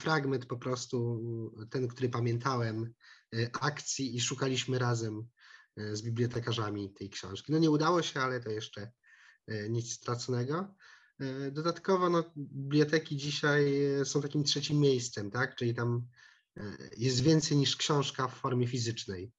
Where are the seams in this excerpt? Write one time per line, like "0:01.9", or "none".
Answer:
0:04.1

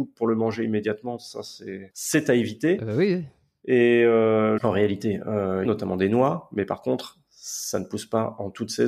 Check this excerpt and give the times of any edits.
0:01.9
0:04.6
0:05.6

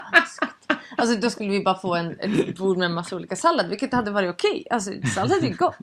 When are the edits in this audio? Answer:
none

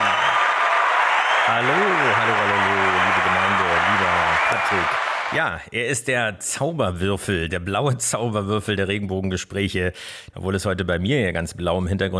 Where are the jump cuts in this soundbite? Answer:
0:10.3

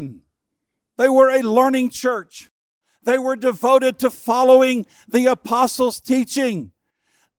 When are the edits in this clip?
none

